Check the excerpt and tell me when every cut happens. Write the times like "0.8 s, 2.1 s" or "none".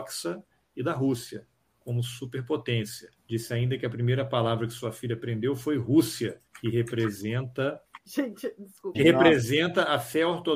8.9 s

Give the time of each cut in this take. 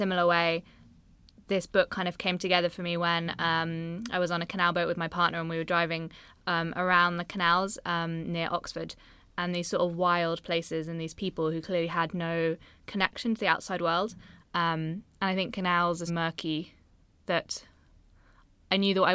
14.4 s, 16.1 s

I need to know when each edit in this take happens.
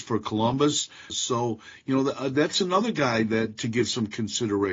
1.1 s

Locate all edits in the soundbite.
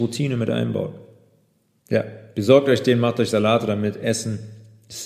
1.8 s

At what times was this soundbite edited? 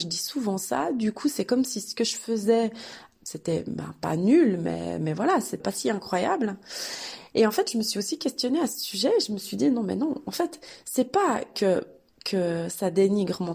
none

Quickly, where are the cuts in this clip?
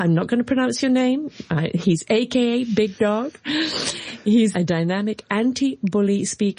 4.5 s

